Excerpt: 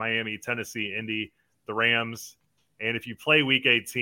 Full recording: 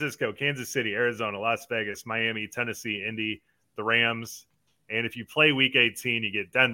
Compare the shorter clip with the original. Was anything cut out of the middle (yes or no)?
no